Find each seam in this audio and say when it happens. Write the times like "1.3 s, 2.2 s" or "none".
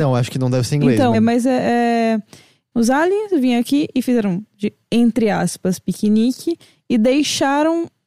1.1 s, 2.7 s